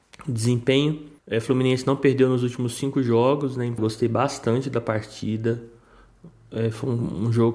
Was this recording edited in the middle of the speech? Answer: yes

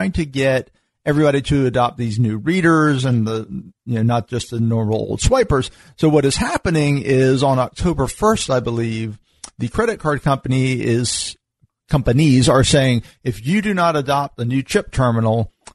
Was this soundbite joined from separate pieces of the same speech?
no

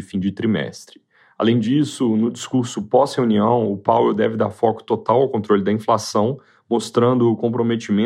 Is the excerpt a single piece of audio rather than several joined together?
yes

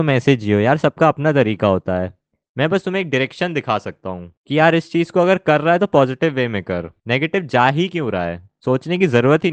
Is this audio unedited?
yes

